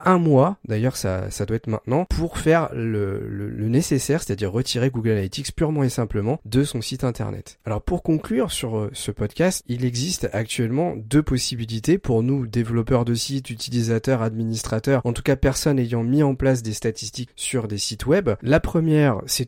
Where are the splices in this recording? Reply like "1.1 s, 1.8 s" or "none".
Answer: none